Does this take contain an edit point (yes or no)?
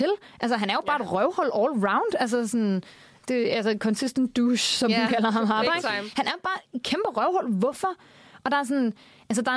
no